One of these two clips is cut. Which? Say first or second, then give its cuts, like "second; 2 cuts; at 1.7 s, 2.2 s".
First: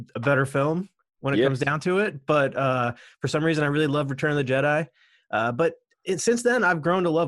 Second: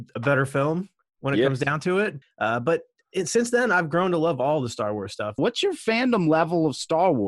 second; 2 cuts; at 2.2 s, 5.4 s